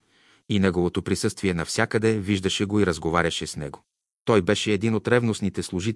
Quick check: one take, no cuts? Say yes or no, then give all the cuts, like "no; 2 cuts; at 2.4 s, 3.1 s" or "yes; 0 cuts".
yes; 0 cuts